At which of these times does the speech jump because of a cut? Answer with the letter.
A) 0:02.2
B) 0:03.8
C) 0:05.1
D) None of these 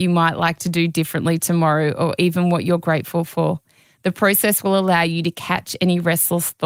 B